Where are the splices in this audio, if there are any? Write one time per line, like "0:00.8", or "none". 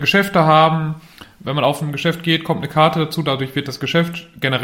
none

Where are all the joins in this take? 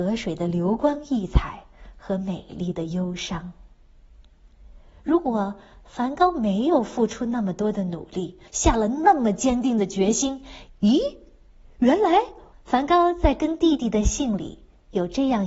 0:08.5
0:10.7
0:12.5

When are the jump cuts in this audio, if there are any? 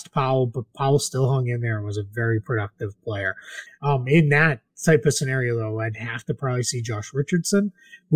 0:03.7

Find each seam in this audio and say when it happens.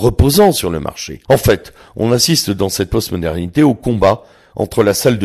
0:01.2

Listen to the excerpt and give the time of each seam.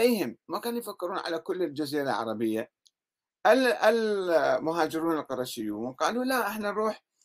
none

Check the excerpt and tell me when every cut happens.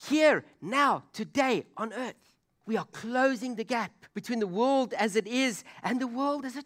0:02.6
0:04.1

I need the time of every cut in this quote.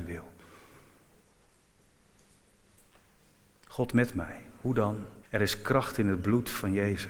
0:05.2

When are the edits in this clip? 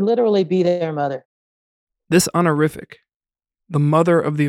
none

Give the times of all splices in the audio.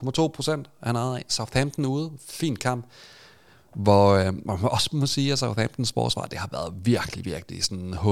none

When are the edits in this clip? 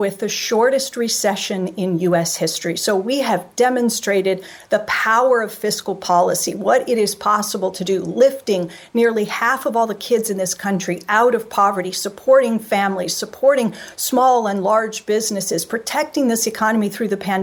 none

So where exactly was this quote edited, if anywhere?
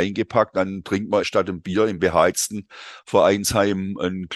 0:01.2

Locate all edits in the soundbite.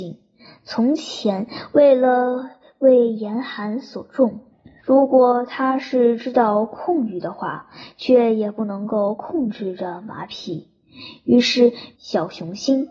0:04.8
0:11.9

